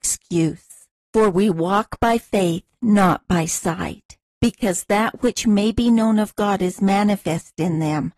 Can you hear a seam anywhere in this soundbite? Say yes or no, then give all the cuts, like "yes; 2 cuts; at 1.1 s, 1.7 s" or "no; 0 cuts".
yes; 2 cuts; at 1.0 s, 4.3 s